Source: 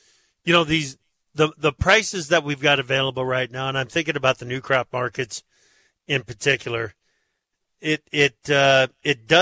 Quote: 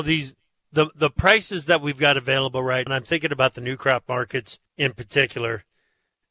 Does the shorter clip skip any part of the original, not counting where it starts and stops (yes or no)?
yes